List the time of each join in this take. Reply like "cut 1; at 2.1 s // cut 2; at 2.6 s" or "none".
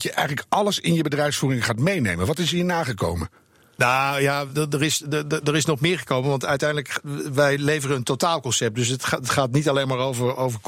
none